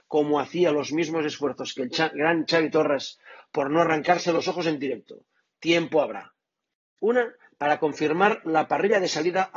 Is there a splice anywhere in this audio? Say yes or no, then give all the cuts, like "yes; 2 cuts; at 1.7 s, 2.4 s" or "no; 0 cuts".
yes; 1 cut; at 7.0 s